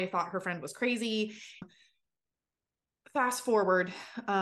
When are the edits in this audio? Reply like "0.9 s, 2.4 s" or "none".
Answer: 1.6 s